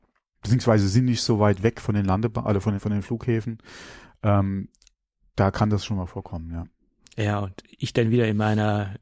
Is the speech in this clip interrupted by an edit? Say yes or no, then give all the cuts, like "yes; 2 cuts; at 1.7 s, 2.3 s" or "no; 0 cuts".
yes; 1 cut; at 2.8 s